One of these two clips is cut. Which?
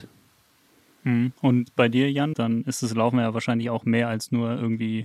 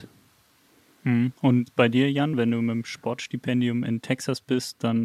first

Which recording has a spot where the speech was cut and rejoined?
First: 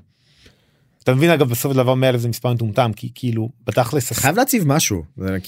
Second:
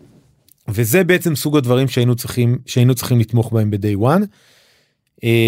first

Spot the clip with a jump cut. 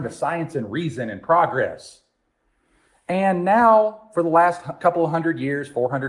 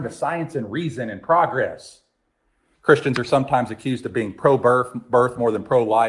second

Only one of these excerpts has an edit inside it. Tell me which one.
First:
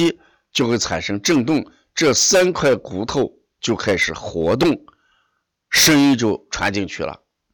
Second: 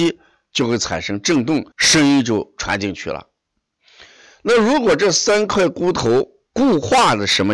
second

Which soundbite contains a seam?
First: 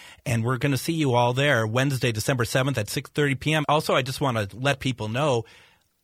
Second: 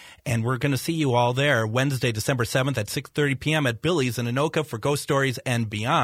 first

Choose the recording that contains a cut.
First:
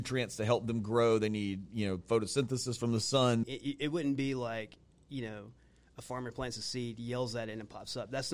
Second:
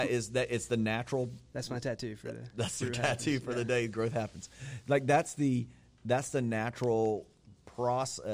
first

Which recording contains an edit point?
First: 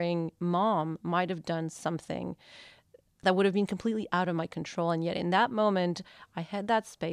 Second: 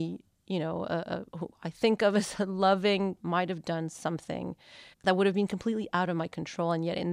second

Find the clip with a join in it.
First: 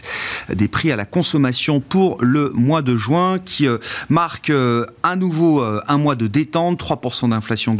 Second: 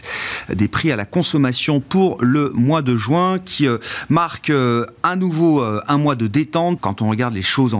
second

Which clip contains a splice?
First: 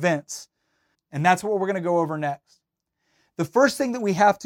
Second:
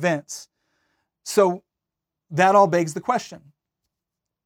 first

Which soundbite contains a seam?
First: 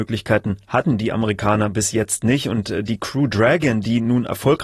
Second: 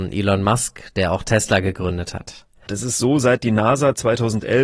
second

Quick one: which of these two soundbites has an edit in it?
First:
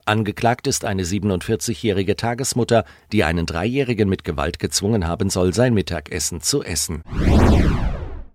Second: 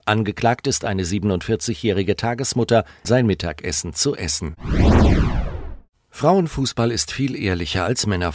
second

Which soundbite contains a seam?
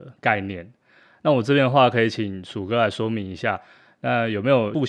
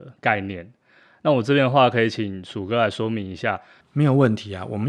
second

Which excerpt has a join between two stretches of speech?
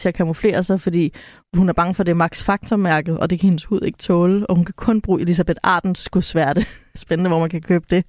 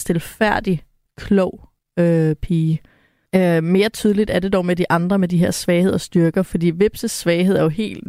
first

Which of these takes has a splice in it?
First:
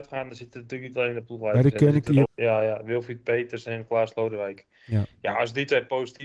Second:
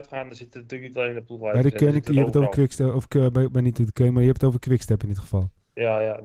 first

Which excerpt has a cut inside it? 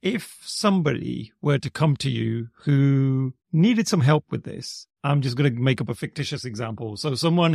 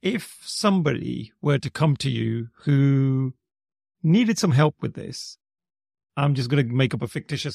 first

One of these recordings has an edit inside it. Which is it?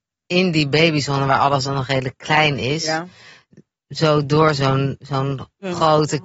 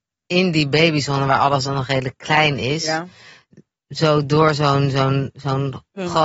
first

